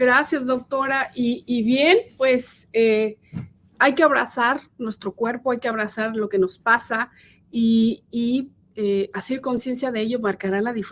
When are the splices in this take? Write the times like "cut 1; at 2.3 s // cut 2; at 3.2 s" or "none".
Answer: none